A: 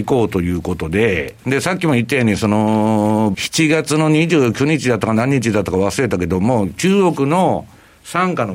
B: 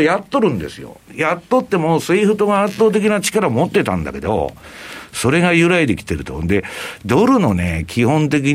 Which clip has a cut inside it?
A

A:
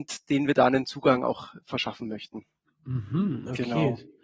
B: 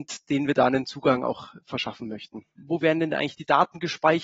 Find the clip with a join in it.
B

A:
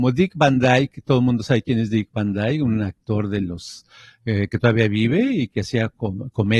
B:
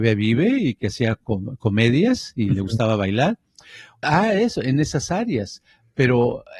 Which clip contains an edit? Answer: B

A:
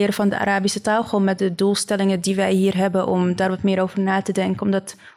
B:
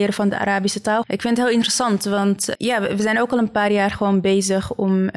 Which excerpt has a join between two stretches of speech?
B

